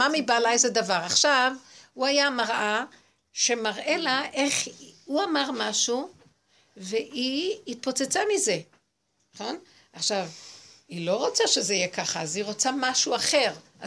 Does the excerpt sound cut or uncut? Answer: uncut